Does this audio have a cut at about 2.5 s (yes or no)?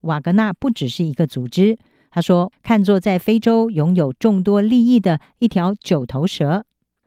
yes